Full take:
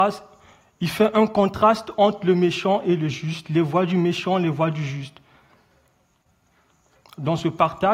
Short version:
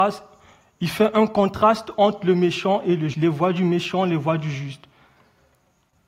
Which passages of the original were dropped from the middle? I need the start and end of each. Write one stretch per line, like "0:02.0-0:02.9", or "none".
0:03.1-0:03.4